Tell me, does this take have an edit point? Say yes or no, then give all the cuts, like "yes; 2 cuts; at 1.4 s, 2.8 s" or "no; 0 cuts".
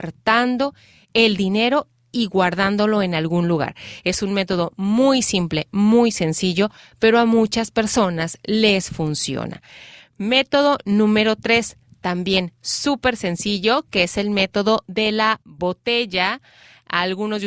no; 0 cuts